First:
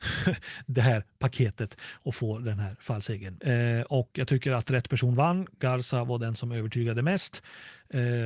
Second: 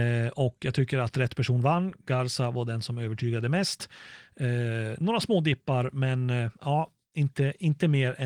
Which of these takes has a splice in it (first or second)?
first